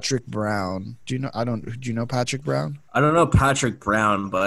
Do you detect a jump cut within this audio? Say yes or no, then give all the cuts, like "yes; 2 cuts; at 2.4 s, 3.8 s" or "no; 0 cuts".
no; 0 cuts